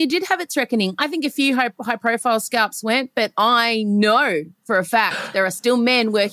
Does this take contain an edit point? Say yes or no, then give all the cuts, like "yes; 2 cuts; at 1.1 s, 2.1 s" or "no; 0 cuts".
no; 0 cuts